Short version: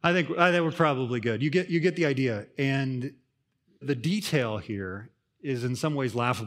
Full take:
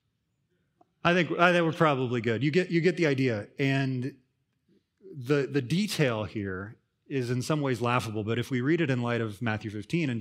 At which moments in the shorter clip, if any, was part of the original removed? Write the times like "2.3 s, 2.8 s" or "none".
3.8 s